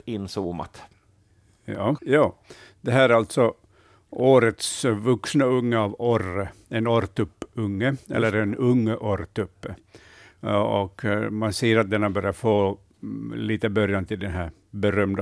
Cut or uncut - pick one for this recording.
cut